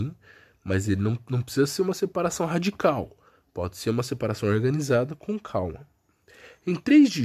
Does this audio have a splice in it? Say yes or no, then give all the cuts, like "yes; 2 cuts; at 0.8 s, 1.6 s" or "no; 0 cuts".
no; 0 cuts